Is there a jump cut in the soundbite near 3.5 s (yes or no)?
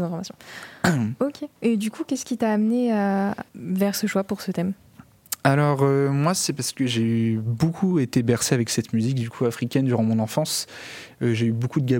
yes